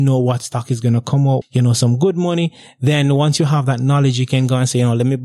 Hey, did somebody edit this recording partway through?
yes; 1 cut; at 1.4 s

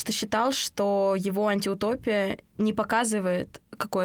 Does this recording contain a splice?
no; 0 cuts

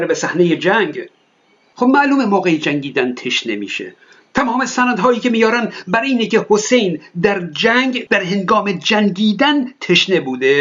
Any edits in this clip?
no; 0 cuts

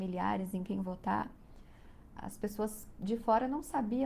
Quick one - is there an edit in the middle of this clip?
yes; 1 cut; at 2.2 s

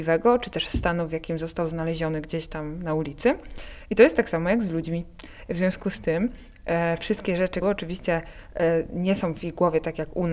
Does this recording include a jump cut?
yes; 2 cuts; at 5.5 s, 7.6 s

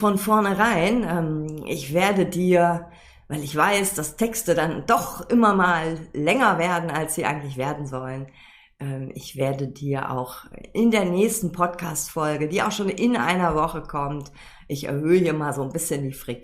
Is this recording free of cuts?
yes; 0 cuts

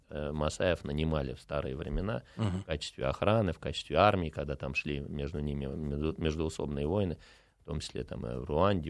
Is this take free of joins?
yes; 0 cuts

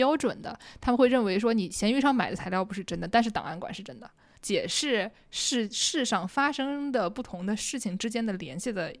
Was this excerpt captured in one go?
no; 1 cut; at 4.3 s

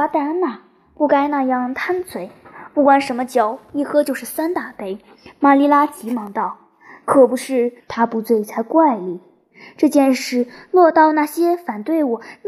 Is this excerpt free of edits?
no; 1 cut; at 7.8 s

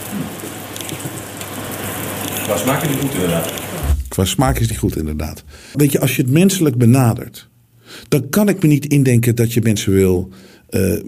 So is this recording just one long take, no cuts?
no; 1 cut; at 5.7 s

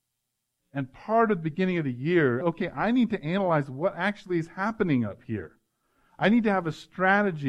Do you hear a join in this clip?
yes; 1 cut; at 2.4 s

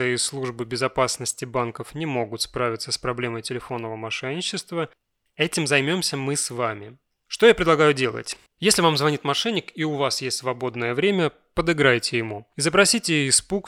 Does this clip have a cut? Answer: no; 0 cuts

